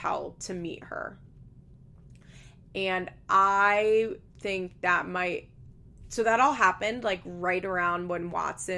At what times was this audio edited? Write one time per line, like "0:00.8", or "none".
none